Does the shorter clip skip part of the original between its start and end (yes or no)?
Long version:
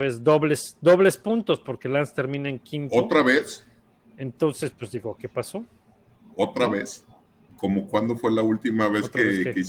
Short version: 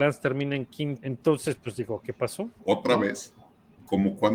yes